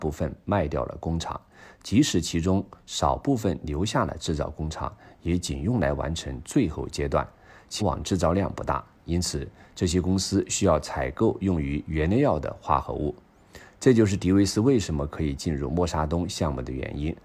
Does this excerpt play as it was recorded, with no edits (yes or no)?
no